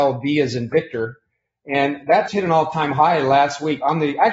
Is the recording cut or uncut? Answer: cut